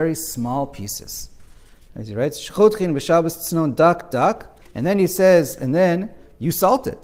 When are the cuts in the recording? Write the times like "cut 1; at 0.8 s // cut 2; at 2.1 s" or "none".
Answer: cut 1; at 4.6 s